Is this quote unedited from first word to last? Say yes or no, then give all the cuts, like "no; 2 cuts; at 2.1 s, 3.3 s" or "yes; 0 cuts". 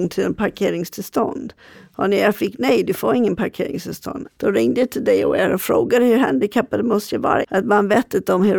no; 2 cuts; at 4.2 s, 7.4 s